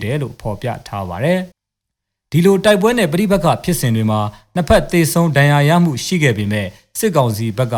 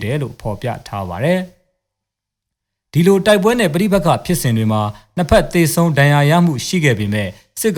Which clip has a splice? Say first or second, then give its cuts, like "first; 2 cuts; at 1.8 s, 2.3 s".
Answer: first; 1 cut; at 1.5 s